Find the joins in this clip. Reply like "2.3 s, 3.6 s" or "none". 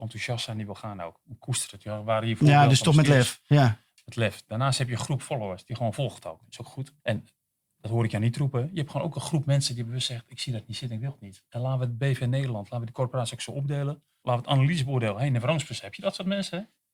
7.0 s, 14.2 s